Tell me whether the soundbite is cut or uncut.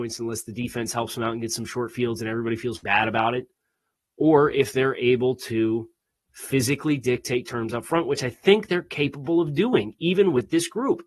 cut